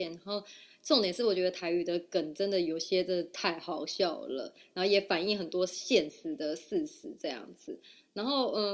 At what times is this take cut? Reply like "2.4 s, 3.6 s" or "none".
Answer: none